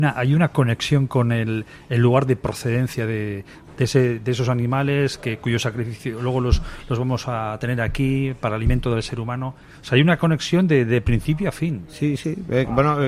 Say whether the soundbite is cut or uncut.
uncut